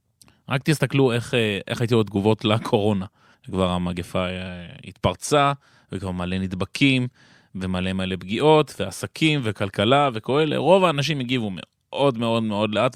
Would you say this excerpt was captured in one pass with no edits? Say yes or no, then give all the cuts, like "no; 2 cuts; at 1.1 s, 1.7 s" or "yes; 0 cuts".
no; 1 cut; at 3.3 s